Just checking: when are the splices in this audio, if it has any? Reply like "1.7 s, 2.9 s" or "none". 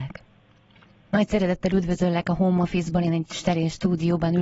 1.1 s